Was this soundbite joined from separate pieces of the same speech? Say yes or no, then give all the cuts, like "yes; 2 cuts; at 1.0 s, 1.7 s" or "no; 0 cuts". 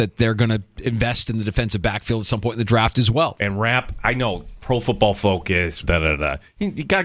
yes; 2 cuts; at 3.4 s, 5.8 s